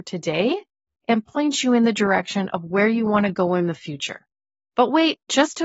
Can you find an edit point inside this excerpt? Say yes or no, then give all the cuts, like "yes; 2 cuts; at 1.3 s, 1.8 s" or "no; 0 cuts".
no; 0 cuts